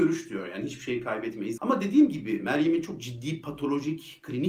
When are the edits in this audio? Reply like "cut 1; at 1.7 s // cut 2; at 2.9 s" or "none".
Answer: cut 1; at 1.6 s